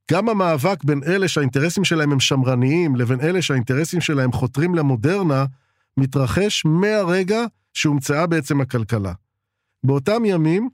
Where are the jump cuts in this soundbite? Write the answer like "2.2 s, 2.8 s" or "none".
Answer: 9.7 s